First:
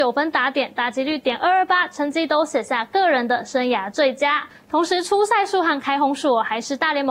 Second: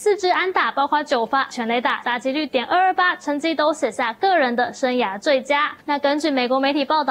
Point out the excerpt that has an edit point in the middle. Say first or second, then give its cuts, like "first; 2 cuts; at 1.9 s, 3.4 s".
second; 2 cuts; at 2.0 s, 5.8 s